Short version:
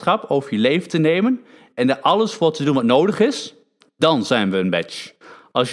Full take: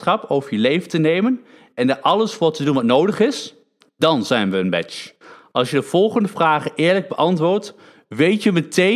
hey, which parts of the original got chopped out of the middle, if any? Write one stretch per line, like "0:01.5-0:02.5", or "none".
none